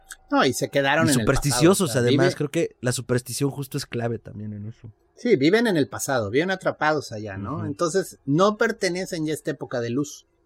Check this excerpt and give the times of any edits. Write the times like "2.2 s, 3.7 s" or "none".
none